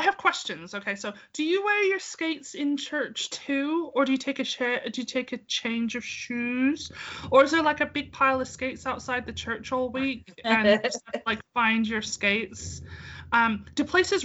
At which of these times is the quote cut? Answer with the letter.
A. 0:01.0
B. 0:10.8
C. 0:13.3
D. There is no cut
D